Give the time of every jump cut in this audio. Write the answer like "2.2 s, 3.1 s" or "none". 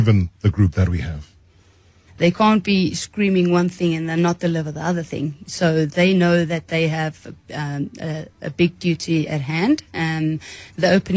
2.1 s, 9.3 s